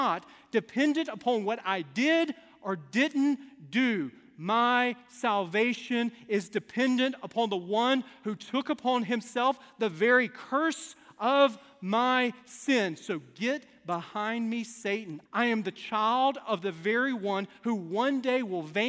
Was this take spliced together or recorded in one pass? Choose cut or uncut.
cut